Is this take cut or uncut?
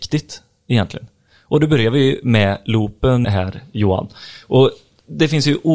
cut